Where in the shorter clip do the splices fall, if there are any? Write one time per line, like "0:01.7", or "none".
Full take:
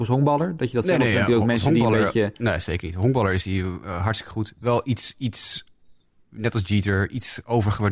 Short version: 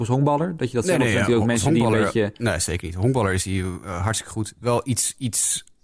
none